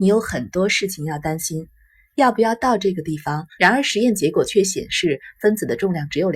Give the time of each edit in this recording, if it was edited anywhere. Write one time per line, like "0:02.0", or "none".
0:03.6